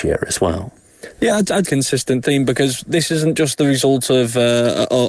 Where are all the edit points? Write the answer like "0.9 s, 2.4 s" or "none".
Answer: 1.6 s

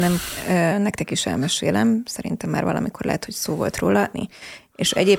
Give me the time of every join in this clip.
4.1 s

